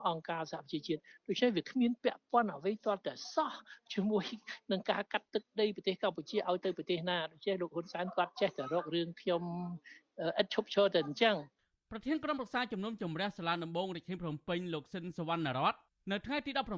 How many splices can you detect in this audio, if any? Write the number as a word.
zero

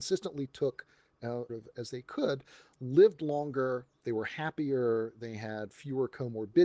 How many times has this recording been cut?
one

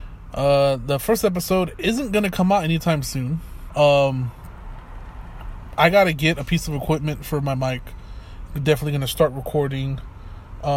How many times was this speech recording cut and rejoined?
two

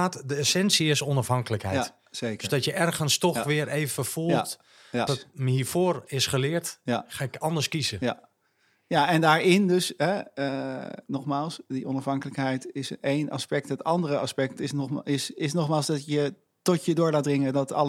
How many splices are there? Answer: one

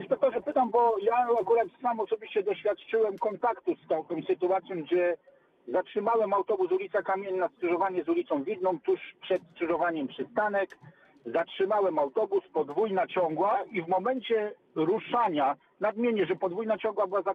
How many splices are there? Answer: zero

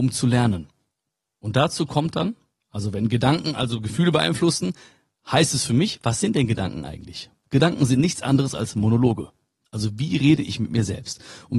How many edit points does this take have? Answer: one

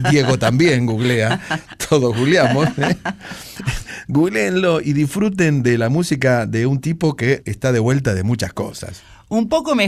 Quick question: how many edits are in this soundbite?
one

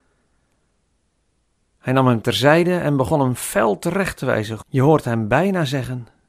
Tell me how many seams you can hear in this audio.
one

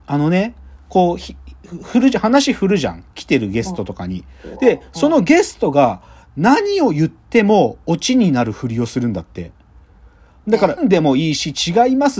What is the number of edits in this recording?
one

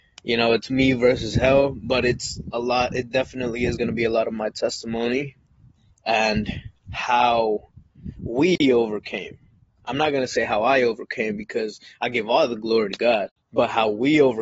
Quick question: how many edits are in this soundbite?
zero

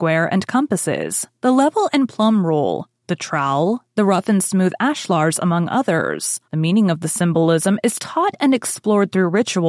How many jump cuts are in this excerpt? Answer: one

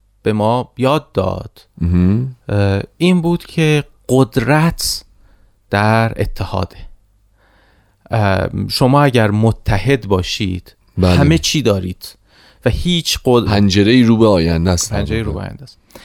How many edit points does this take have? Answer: one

